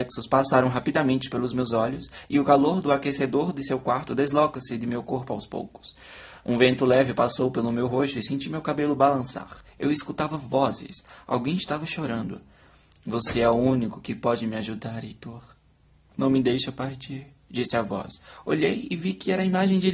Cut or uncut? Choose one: uncut